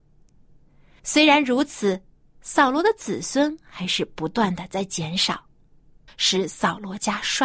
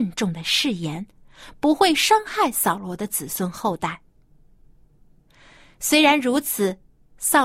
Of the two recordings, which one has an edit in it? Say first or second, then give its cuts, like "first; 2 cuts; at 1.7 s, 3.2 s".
first; 2 cuts; at 1.0 s, 6.1 s